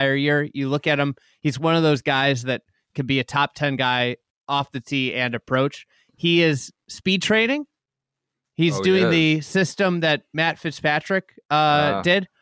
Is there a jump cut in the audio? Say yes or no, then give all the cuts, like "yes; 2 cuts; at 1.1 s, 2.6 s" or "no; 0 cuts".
no; 0 cuts